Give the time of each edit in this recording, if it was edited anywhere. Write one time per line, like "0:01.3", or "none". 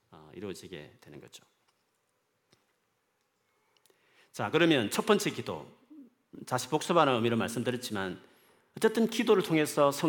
none